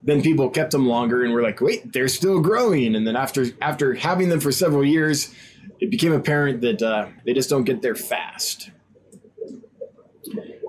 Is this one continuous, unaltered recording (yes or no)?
no